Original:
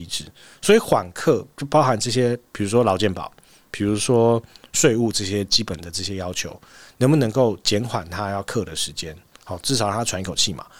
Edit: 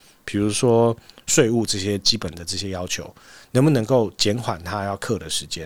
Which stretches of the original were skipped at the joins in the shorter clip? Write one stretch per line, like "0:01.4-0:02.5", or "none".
none